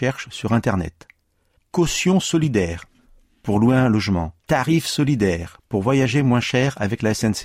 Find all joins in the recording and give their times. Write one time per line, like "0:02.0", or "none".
0:01.6
0:04.4